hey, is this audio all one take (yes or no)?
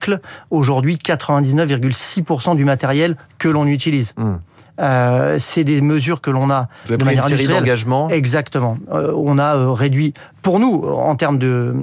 yes